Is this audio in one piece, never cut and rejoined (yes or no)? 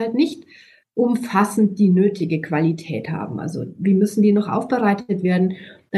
yes